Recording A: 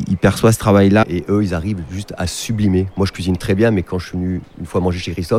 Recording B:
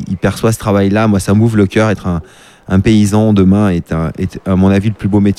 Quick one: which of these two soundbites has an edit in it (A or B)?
A